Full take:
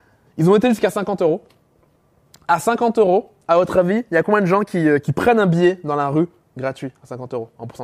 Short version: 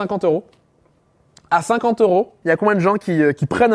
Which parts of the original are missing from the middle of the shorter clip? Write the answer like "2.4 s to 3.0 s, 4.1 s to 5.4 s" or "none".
3.4 s to 4.1 s